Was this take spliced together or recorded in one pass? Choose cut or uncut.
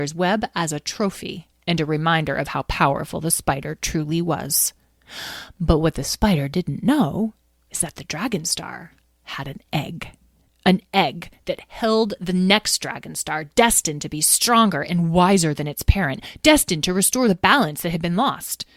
uncut